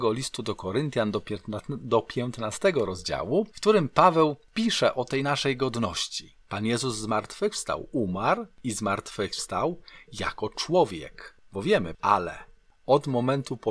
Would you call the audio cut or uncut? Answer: cut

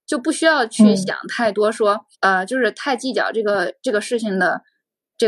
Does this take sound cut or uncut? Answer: cut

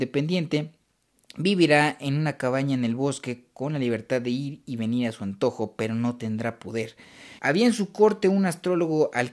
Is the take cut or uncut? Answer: cut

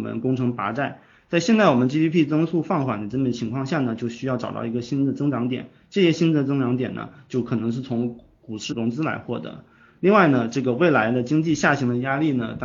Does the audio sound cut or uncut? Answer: cut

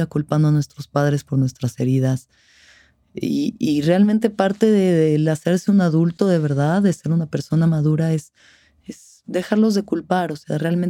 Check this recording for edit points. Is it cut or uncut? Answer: uncut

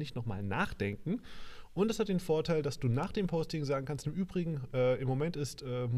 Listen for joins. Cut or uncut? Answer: uncut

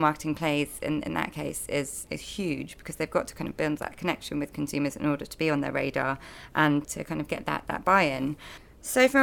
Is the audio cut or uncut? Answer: cut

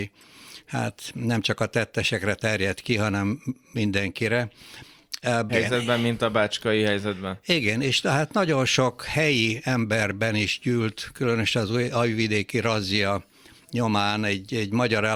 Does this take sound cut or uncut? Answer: cut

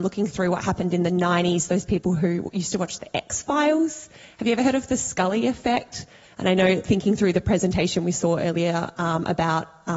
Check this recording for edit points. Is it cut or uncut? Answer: cut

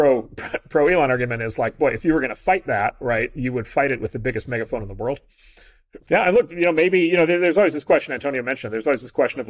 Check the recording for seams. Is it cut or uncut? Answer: cut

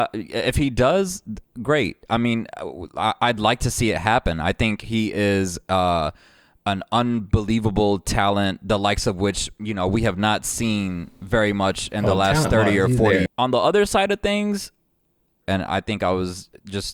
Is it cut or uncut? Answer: cut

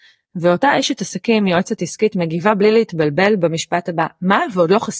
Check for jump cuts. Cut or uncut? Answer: uncut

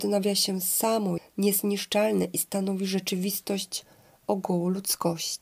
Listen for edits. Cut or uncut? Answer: cut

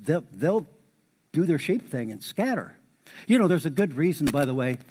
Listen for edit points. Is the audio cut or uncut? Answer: uncut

